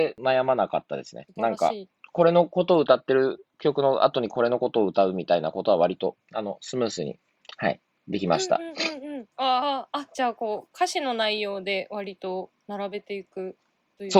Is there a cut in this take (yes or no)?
yes